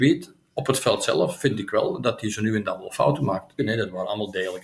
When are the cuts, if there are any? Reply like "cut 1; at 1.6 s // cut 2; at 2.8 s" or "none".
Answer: cut 1; at 3.6 s